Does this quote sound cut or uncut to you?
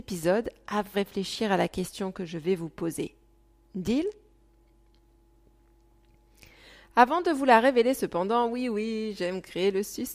cut